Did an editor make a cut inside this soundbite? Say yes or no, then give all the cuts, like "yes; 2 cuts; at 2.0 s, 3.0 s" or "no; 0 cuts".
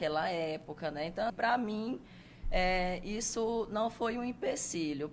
yes; 1 cut; at 1.3 s